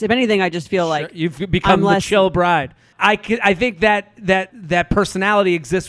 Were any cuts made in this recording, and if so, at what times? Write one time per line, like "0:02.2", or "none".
0:02.9
0:04.5